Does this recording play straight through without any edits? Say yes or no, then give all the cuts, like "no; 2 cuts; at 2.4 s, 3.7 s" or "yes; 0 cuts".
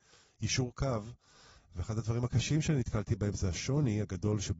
yes; 0 cuts